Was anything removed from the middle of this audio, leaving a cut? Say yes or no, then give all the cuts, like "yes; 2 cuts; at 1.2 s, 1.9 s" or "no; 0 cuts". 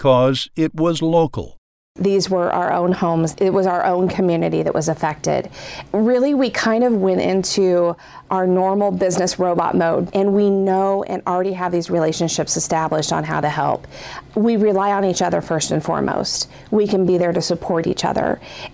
yes; 1 cut; at 10.1 s